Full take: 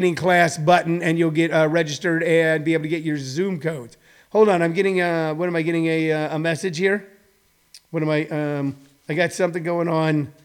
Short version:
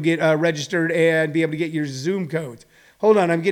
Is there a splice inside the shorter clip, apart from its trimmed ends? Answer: no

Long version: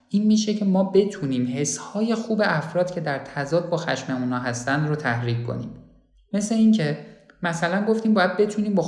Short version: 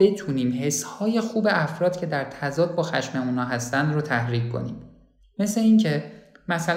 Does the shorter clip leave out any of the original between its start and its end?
no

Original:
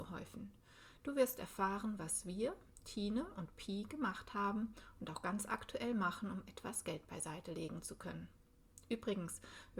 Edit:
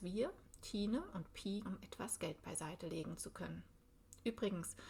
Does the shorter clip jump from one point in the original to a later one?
yes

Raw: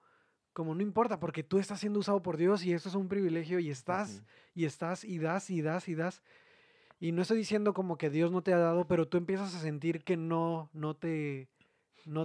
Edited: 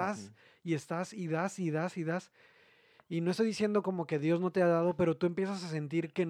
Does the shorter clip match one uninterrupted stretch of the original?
yes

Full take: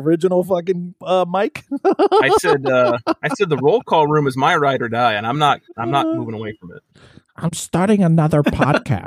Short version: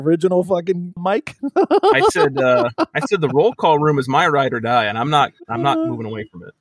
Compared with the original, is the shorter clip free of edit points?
no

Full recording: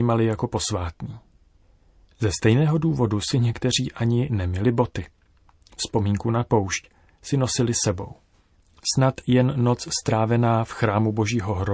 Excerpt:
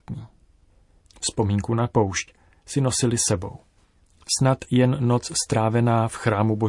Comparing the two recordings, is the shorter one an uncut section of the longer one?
no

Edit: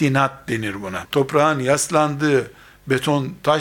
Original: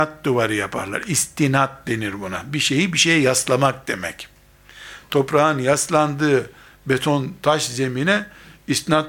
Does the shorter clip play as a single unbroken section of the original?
no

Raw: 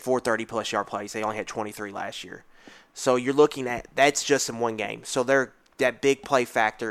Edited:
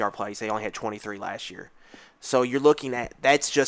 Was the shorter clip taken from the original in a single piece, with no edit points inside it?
yes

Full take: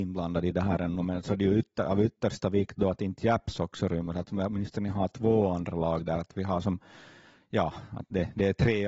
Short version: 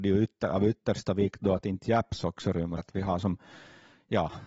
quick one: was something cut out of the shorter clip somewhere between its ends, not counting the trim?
yes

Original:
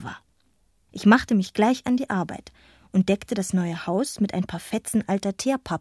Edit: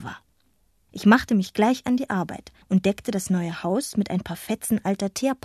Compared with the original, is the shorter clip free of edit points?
no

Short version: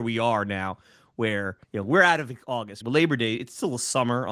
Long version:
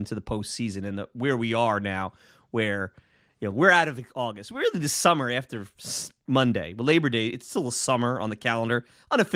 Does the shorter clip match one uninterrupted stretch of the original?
no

